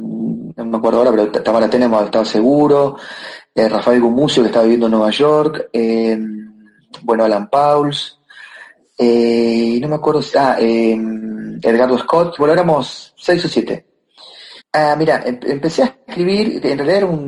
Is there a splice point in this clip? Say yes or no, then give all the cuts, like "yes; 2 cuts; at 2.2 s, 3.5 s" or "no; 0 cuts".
yes; 2 cuts; at 12.4 s, 14.6 s